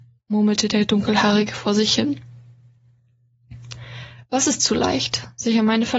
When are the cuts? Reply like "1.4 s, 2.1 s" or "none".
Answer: none